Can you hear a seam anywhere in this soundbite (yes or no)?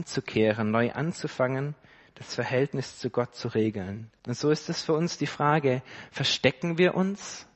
yes